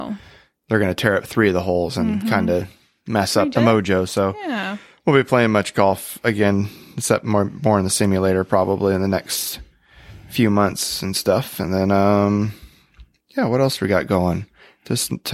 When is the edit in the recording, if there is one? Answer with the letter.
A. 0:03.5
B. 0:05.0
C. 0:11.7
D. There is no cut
A